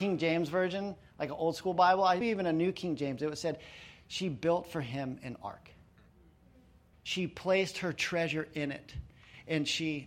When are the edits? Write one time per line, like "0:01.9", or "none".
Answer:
0:02.2
0:06.9